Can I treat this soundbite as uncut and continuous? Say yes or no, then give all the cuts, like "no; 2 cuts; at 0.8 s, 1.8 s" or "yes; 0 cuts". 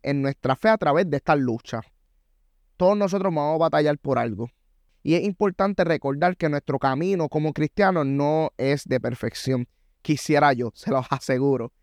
yes; 0 cuts